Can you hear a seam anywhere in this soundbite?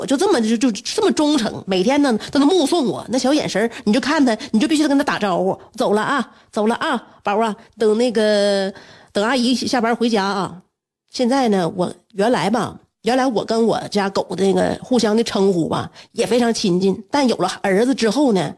no; 0 cuts

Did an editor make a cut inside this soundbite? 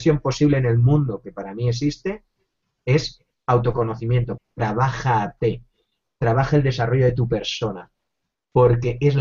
yes; 1 cut; at 4.4 s

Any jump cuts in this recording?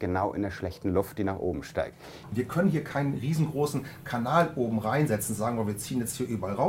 yes; 1 cut; at 2.2 s

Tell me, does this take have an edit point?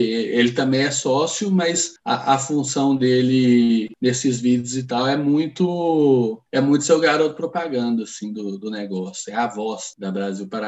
no; 0 cuts

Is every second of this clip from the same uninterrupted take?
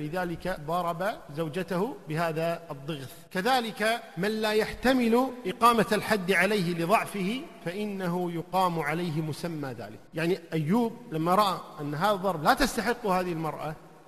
no; 2 cuts; at 3.3 s, 10.1 s

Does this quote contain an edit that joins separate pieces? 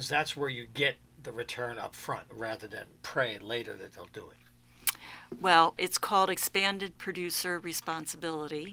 yes; 1 cut; at 5.8 s

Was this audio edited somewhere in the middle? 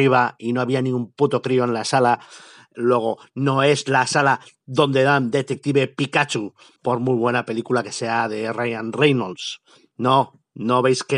yes; 1 cut; at 6.8 s

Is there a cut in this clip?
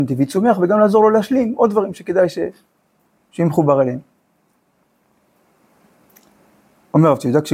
no; 0 cuts

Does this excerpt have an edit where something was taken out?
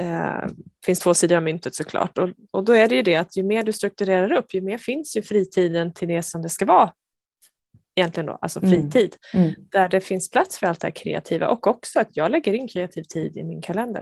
no; 0 cuts

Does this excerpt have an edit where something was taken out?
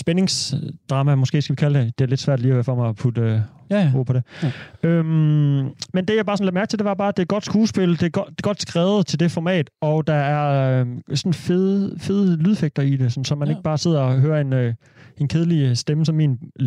no; 0 cuts

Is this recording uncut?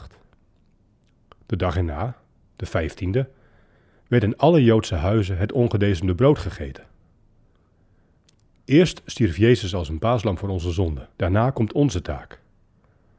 no; 2 cuts; at 8.5 s, 11.1 s

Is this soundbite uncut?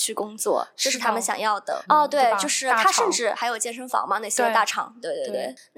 no; 1 cut; at 1.9 s

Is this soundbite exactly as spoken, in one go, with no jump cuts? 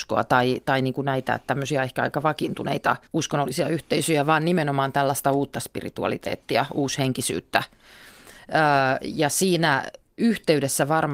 no; 1 cut; at 3.1 s

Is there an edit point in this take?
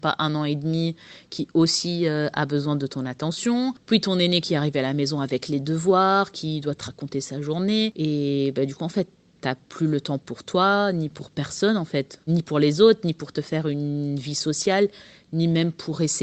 no; 0 cuts

